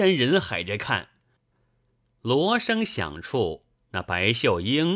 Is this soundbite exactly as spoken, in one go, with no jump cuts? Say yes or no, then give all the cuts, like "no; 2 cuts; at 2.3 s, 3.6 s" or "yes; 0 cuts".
no; 1 cut; at 1.4 s